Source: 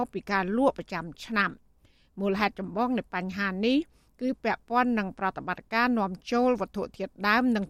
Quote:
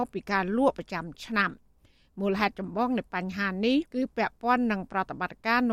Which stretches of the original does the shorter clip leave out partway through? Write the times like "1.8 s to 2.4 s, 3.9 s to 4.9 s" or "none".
3.9 s to 4.1 s